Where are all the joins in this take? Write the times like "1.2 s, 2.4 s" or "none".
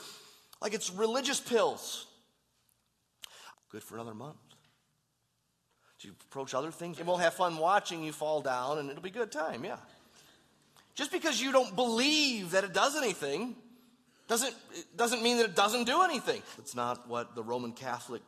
3.5 s, 7.0 s, 16.6 s